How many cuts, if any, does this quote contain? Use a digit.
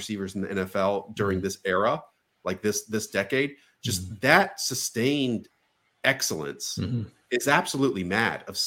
0